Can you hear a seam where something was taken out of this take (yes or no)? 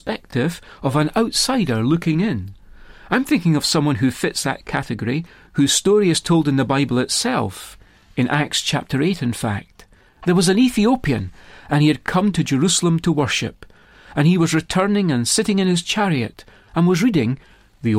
no